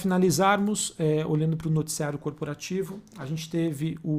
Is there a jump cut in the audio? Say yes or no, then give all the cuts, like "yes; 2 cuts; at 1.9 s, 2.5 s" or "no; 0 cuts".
no; 0 cuts